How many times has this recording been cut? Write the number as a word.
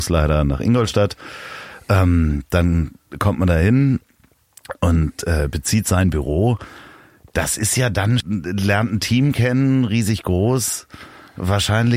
one